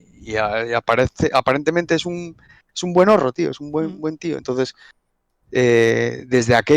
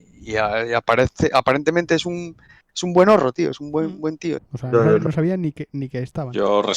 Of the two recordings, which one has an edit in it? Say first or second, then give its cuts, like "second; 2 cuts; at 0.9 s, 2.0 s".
second; 1 cut; at 4.4 s